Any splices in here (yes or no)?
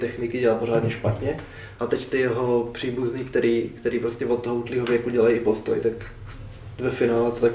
yes